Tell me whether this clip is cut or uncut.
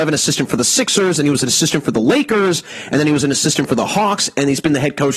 uncut